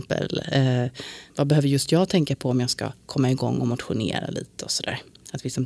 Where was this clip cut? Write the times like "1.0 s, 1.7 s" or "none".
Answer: 1.3 s